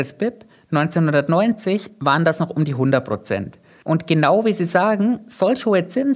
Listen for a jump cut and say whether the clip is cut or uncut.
uncut